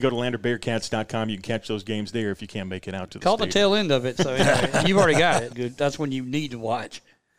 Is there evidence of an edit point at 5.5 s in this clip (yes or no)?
yes